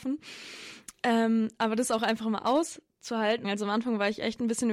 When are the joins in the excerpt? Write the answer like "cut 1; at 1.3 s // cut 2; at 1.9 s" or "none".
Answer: cut 1; at 3.4 s